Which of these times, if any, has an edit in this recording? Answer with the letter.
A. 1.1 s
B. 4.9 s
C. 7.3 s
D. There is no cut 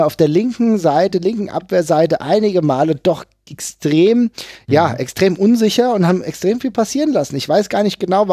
D